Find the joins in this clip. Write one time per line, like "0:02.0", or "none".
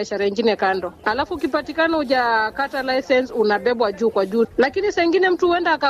0:01.0
0:04.4